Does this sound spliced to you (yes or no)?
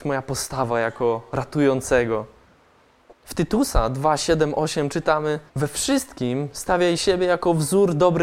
yes